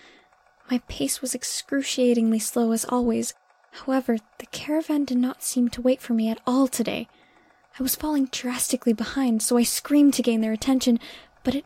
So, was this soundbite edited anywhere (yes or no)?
no